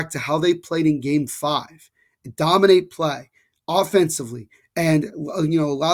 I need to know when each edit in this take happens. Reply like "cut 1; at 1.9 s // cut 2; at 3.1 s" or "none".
cut 1; at 4.6 s

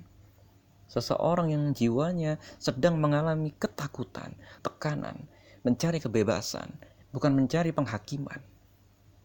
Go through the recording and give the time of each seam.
cut 1; at 4.6 s // cut 2; at 7.0 s

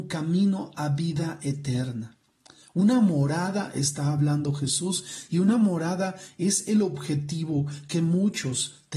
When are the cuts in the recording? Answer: none

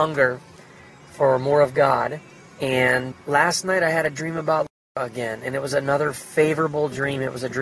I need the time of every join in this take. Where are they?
cut 1; at 3.1 s

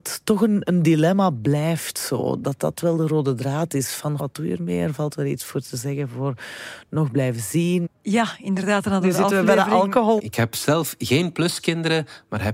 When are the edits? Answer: cut 1; at 4.2 s // cut 2; at 7.9 s // cut 3; at 10.2 s

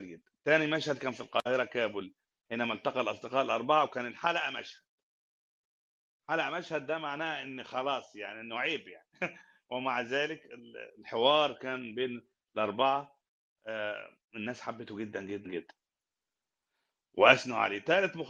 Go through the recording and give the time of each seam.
cut 1; at 15.5 s

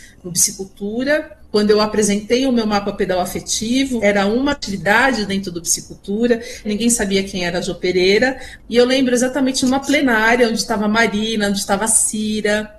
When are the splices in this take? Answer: cut 1; at 1.4 s // cut 2; at 6.6 s

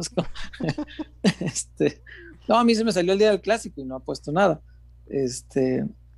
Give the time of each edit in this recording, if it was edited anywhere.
none

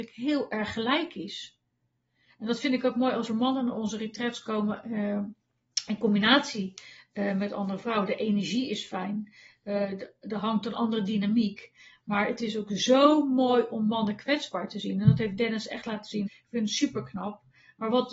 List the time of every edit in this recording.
cut 1; at 16.3 s

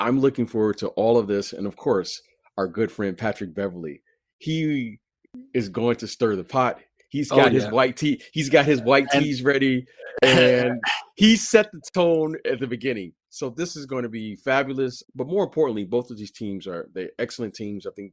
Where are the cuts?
cut 1; at 15.0 s

